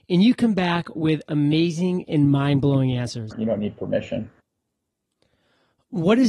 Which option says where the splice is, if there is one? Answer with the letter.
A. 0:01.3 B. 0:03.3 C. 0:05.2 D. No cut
B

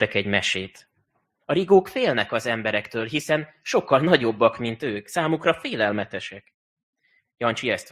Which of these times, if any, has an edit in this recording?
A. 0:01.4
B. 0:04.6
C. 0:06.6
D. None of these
A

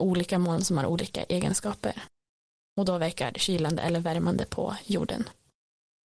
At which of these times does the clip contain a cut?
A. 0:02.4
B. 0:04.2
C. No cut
C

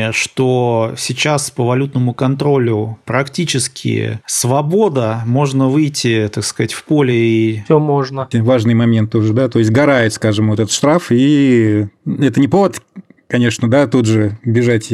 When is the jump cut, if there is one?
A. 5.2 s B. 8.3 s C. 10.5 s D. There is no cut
B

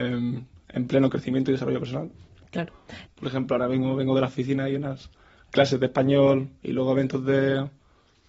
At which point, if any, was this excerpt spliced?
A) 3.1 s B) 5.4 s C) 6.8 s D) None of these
A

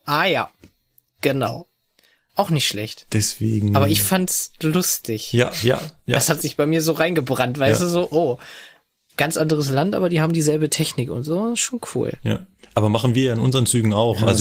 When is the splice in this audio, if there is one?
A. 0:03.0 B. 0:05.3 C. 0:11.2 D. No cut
D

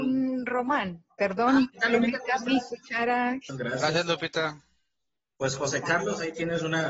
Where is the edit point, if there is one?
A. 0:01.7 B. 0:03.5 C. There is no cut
B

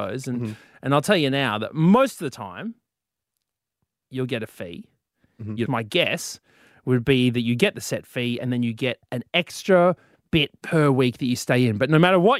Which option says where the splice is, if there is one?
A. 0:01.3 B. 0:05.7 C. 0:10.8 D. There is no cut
B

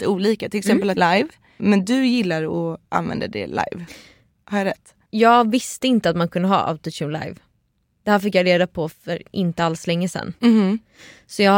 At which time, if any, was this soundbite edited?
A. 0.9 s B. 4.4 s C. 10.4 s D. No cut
A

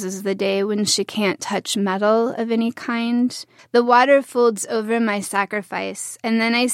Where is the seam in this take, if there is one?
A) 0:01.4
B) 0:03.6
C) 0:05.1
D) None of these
B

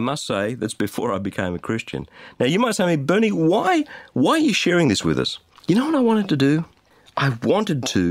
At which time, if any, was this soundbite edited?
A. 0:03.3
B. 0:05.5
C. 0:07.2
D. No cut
B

